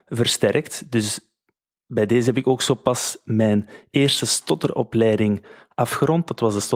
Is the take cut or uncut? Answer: uncut